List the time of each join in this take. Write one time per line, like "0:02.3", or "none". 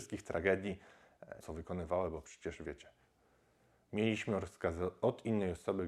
0:01.4